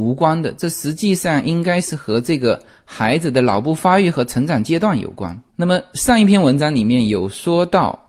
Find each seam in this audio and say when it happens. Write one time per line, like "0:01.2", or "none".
0:05.5